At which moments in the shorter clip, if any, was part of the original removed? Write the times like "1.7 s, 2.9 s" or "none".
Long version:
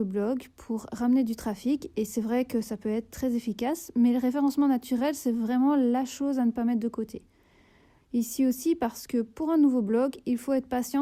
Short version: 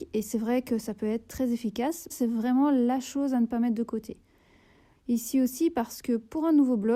2.1 s